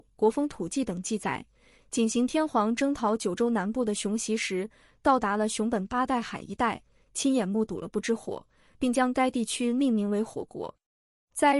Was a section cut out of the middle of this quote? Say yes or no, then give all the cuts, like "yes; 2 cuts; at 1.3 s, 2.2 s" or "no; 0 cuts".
no; 0 cuts